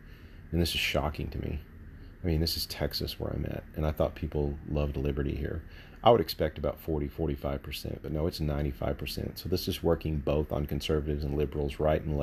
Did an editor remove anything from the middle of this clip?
no; 0 cuts

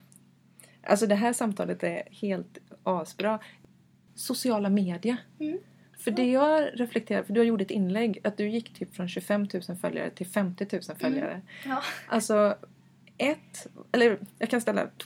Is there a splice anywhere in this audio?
no; 0 cuts

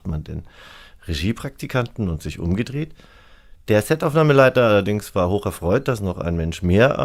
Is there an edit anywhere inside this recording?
no; 0 cuts

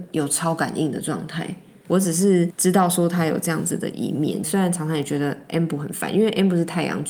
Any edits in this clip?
yes; 2 cuts; at 1.8 s, 4.4 s

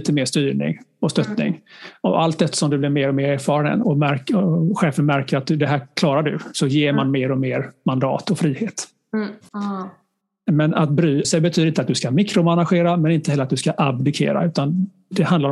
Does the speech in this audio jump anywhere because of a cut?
yes; 3 cuts; at 3.8 s, 9.5 s, 11.2 s

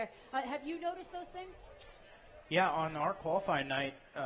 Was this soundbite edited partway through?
no; 0 cuts

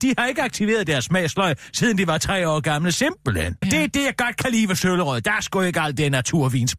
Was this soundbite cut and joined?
yes; 1 cut; at 3.6 s

